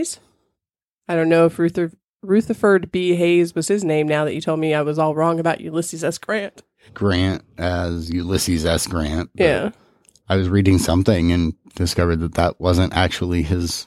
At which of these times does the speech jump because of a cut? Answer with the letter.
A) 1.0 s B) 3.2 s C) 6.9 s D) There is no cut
C